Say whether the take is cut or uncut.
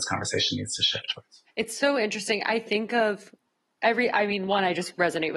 uncut